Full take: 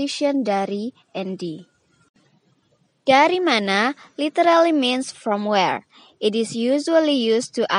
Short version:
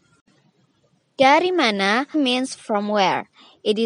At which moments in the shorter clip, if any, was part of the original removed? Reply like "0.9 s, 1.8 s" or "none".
2.1 s